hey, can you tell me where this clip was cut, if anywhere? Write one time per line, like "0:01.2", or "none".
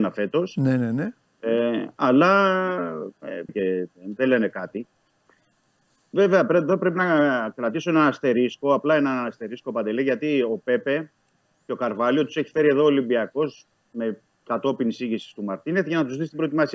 0:03.5